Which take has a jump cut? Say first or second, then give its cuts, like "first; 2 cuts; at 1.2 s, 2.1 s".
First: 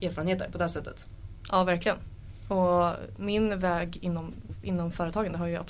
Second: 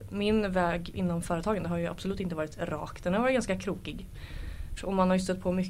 second; 2 cuts; at 0.9 s, 4.8 s